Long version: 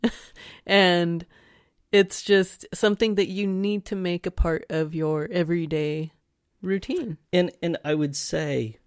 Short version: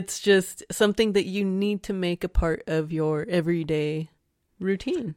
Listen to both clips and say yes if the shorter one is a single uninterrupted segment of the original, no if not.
yes